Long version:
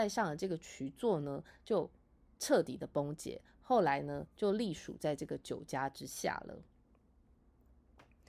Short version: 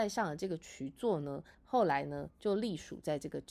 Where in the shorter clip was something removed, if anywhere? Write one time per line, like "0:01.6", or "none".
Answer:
0:01.5